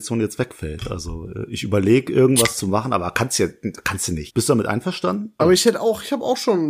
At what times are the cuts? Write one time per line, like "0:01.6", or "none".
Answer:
0:04.3
0:05.4